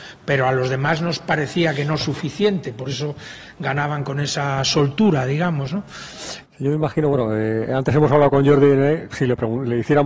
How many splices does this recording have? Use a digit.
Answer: 1